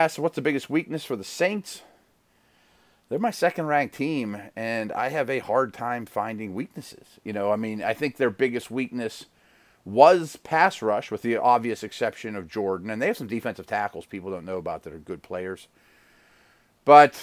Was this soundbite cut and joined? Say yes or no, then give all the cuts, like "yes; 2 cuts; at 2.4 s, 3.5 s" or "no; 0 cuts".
no; 0 cuts